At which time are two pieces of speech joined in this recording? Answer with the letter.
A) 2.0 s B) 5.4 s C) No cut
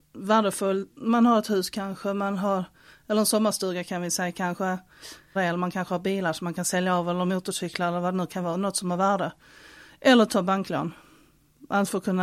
B